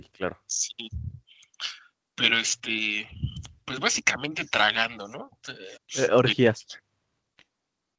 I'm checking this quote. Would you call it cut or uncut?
cut